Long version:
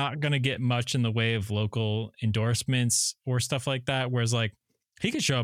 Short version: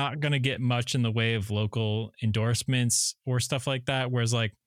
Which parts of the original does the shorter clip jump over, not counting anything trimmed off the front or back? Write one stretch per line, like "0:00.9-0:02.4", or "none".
none